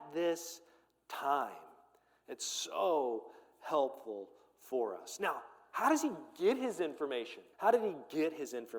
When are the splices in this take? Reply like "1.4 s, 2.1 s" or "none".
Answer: 7.5 s